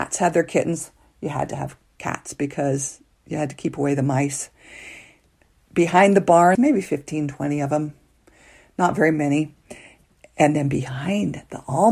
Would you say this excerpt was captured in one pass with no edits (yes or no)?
no